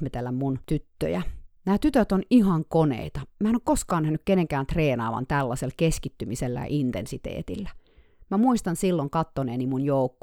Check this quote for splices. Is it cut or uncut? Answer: uncut